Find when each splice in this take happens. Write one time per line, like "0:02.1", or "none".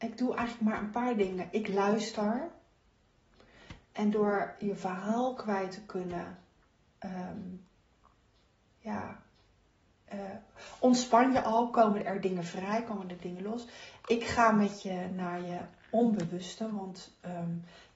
0:10.1